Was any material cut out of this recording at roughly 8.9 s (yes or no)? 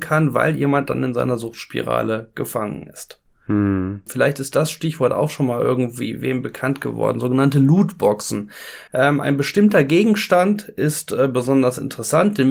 yes